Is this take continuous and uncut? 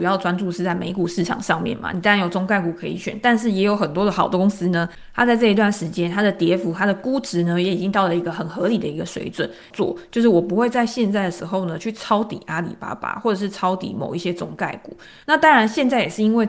no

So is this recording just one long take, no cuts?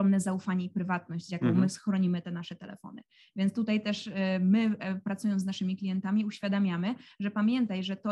yes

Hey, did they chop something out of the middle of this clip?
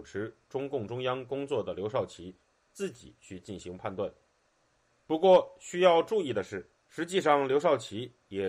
yes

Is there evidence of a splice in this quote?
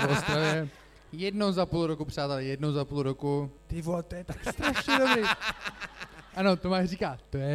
yes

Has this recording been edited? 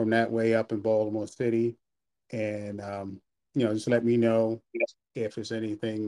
no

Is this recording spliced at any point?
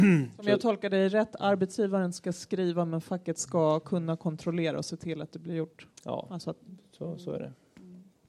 no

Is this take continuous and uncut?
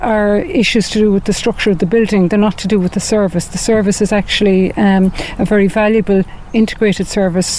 yes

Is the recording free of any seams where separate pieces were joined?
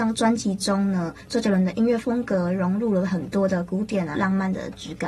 no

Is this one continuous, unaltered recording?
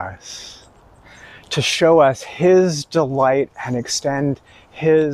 yes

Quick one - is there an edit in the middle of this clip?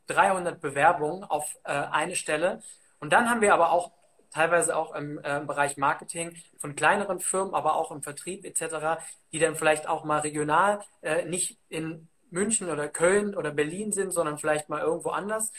no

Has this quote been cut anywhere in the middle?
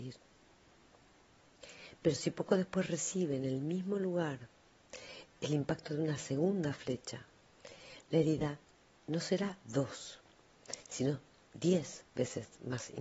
no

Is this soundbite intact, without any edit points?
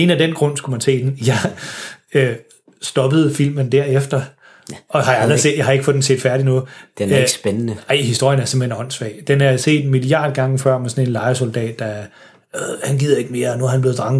yes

